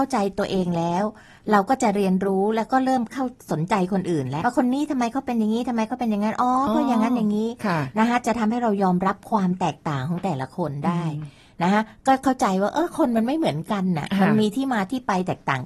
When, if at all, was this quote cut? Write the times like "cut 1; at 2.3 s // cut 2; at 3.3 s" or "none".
cut 1; at 4.4 s